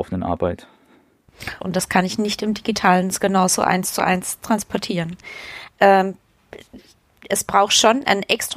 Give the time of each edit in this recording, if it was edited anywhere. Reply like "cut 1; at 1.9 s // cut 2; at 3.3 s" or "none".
cut 1; at 1.6 s // cut 2; at 5.7 s